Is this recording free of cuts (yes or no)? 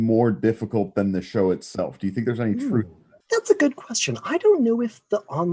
yes